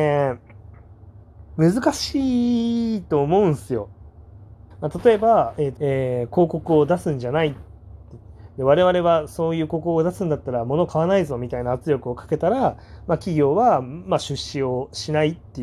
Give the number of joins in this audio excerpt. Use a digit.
2